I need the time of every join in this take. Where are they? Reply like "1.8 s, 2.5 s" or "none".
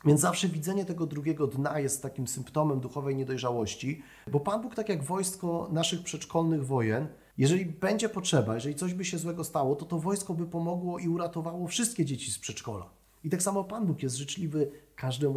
4.2 s